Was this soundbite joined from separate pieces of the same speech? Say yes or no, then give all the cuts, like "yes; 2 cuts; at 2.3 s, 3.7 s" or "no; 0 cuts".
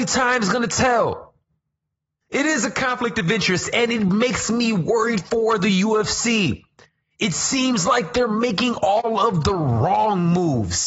yes; 1 cut; at 2.2 s